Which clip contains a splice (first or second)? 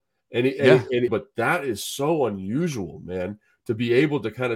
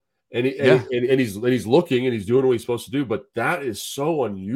first